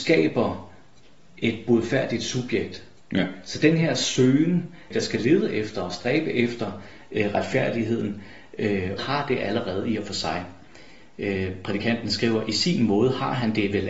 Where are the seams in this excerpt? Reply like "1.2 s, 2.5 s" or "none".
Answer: 4.9 s, 9.0 s